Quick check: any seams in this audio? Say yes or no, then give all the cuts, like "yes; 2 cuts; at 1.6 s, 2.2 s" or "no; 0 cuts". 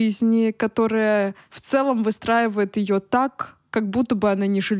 no; 0 cuts